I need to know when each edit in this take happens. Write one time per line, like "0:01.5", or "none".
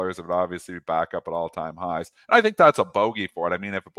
none